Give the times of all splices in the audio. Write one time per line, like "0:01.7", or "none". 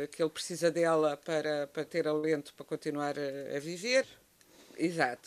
0:04.0